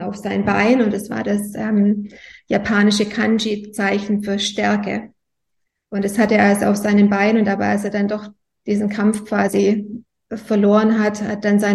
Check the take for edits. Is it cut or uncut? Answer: uncut